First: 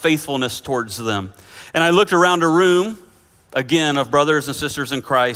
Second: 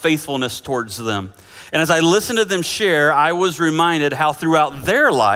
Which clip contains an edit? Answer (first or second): first